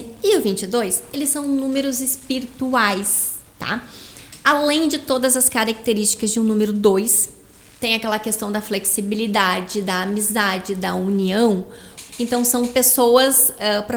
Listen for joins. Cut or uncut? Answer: cut